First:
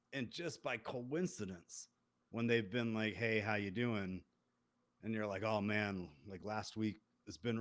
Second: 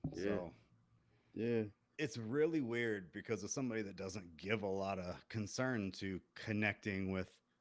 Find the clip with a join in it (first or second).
second